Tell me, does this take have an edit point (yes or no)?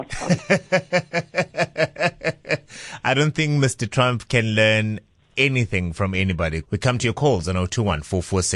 yes